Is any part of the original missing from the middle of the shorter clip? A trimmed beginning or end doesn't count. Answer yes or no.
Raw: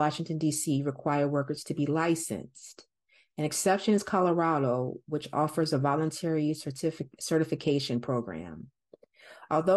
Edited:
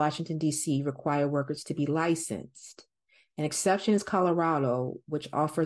no